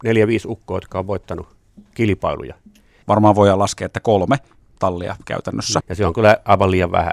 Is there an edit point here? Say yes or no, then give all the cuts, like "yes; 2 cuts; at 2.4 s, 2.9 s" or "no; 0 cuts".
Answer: yes; 2 cuts; at 3.0 s, 5.8 s